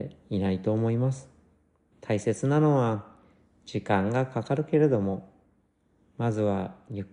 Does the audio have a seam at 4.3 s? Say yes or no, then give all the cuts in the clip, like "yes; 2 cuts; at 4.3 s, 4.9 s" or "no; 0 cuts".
no; 1 cut; at 1.9 s